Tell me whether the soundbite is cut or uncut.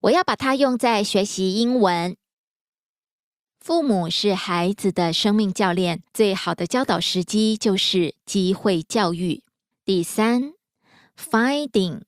cut